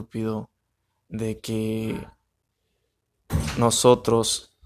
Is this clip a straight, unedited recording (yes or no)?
yes